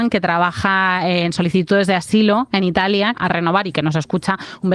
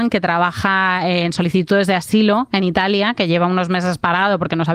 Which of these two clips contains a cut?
first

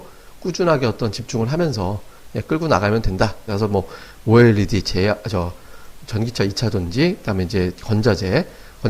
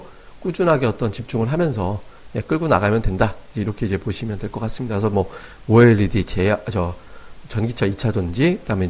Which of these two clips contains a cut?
first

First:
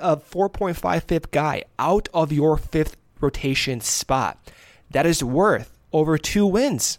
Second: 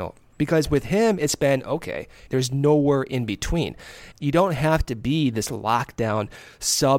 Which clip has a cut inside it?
second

